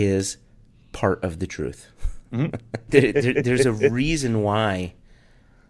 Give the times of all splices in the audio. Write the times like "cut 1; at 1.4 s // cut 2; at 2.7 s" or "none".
cut 1; at 2.9 s